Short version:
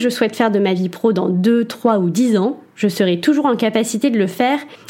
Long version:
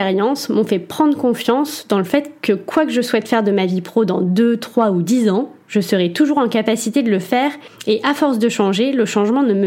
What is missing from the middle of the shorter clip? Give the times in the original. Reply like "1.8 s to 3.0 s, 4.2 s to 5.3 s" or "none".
none